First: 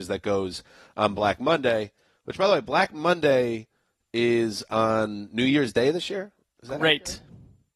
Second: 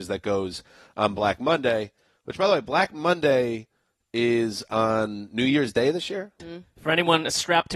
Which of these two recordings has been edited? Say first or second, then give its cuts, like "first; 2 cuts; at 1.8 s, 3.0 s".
second; 1 cut; at 6.4 s